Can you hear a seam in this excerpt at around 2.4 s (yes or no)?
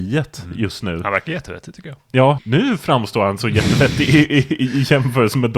yes